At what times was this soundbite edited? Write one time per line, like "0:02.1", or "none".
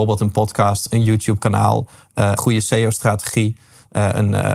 0:02.4